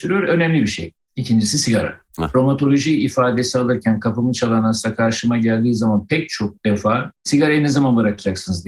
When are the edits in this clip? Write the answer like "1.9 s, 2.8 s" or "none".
none